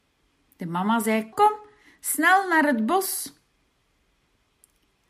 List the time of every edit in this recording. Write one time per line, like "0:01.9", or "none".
0:01.3